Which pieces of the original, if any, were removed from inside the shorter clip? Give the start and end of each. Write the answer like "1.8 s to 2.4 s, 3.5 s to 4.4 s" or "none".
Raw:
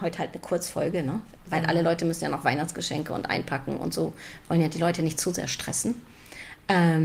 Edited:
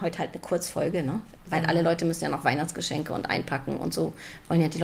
none